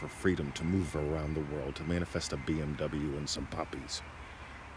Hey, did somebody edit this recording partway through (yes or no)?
no